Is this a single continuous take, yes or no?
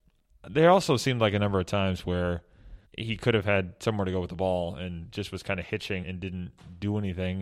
no